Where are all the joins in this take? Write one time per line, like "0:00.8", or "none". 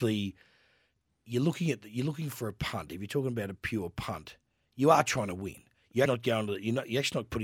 0:06.1